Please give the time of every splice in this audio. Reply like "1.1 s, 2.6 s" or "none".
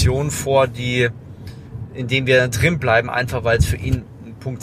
none

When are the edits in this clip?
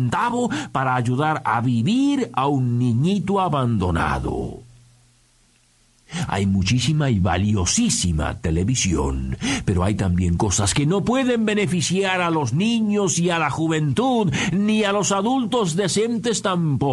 none

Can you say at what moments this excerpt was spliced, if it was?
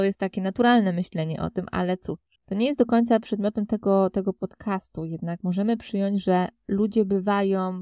none

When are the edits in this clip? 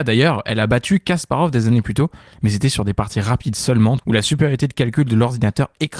4.0 s

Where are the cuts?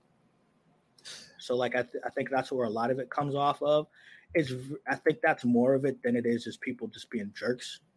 1.4 s

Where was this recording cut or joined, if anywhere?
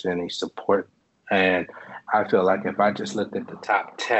none

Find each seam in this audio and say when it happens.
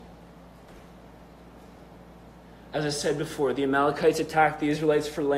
none

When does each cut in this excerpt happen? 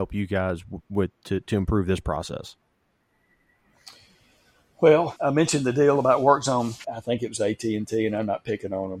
5.2 s, 6.8 s

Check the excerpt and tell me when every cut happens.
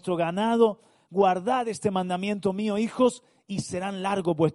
none

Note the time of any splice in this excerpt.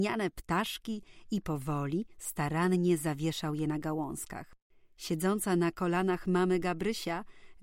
none

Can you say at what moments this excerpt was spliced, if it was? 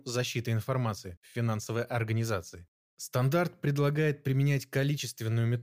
2.9 s

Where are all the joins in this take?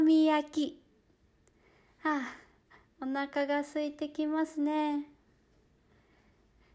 none

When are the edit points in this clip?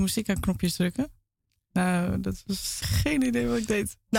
2.8 s

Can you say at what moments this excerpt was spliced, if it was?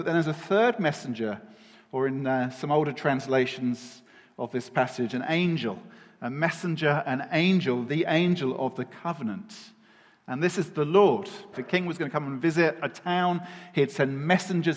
7.9 s, 11.5 s

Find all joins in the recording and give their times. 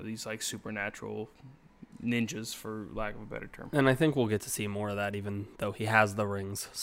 none

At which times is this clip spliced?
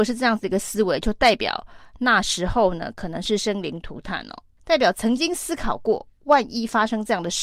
4.6 s

